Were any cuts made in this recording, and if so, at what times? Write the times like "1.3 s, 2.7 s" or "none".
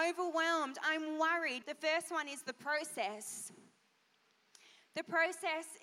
1.6 s